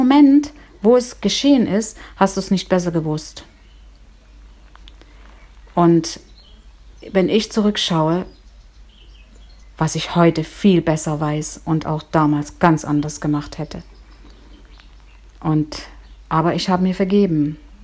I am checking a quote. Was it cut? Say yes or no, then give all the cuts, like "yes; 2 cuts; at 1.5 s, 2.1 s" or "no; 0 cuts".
yes; 1 cut; at 9.6 s